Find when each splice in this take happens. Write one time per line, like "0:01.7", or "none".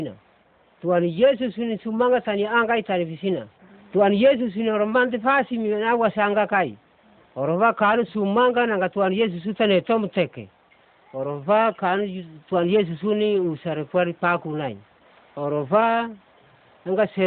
none